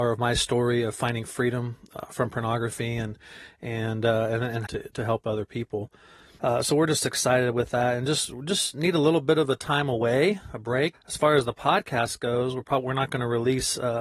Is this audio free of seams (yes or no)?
no